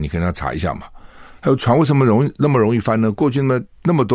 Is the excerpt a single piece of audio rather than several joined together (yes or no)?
yes